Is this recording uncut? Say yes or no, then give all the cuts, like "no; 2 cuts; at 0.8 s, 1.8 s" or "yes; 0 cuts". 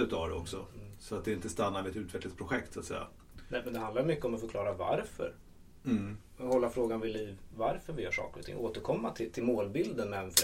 yes; 0 cuts